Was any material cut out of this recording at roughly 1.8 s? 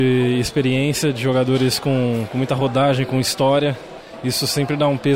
no; 0 cuts

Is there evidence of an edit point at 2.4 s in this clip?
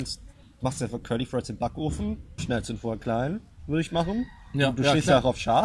yes; 1 cut; at 2.4 s

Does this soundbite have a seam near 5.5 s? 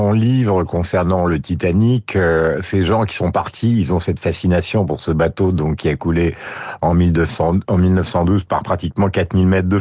no; 0 cuts

